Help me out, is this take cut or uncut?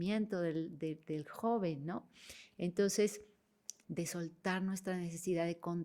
cut